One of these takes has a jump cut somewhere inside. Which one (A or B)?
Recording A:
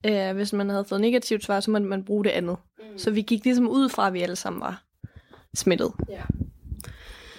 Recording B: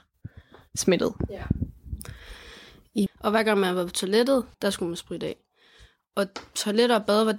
B